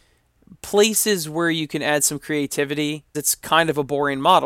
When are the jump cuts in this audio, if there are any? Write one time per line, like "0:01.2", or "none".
0:03.1